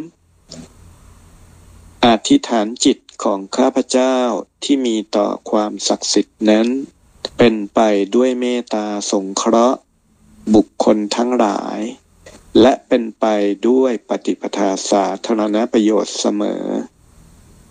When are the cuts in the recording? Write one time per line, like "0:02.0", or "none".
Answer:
0:07.3